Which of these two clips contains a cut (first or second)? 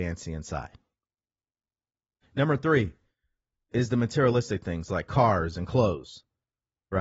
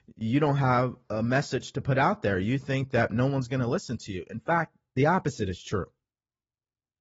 first